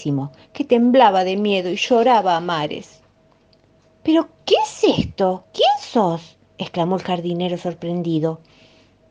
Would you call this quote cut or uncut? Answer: uncut